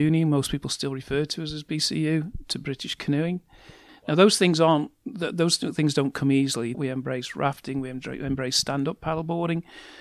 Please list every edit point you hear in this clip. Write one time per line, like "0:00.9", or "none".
0:03.9
0:06.7